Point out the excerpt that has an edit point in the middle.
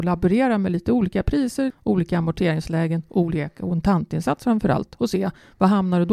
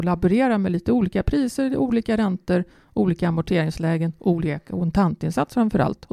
first; 1 cut; at 1.7 s

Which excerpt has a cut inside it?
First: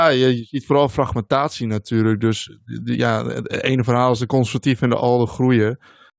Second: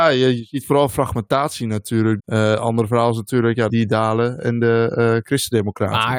second; 2 cuts; at 2.2 s, 3.7 s

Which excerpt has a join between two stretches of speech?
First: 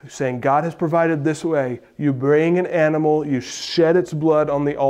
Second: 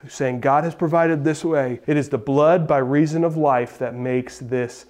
second; 1 cut; at 1.8 s

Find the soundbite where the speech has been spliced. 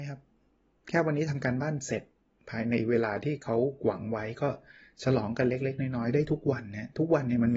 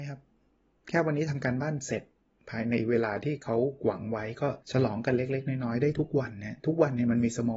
second; 1 cut; at 4.6 s

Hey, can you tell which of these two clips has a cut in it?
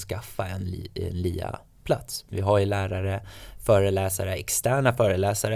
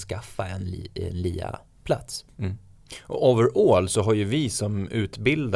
first; 1 cut; at 2.3 s

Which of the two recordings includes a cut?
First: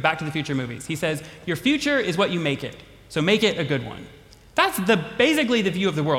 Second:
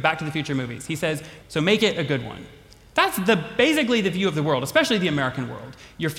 second; 1 cut; at 1.4 s

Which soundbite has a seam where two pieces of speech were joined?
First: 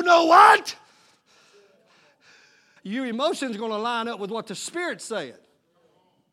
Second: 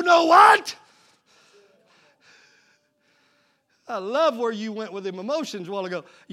first; 1 cut; at 2.8 s

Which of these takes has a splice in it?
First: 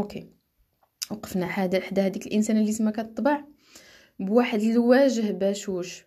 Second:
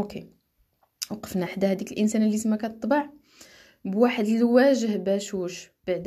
second; 1 cut; at 1.5 s

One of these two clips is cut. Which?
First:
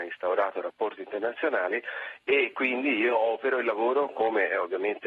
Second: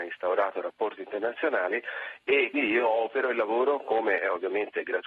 second; 1 cut; at 2.5 s

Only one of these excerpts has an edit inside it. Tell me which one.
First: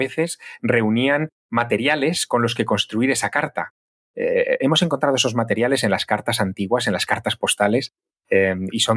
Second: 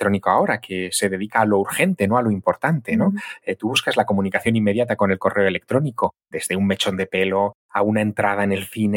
second; 2 cuts; at 6.3 s, 7.6 s

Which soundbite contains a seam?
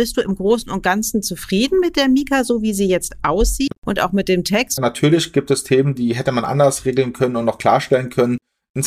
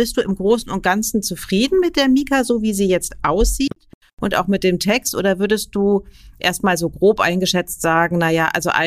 first; 2 cuts; at 3.8 s, 4.8 s

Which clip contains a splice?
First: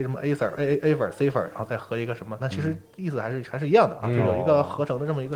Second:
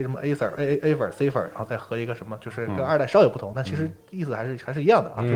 first; 1 cut; at 2.4 s

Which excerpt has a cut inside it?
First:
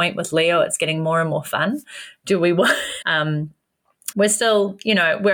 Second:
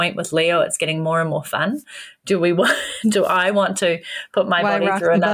first; 2 cuts; at 3.0 s, 4.1 s

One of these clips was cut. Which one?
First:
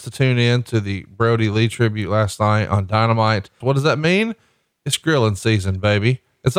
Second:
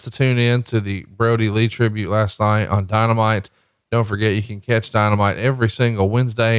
first; 1 cut; at 3.6 s

